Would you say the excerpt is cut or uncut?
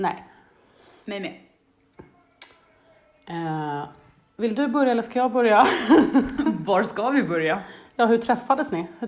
uncut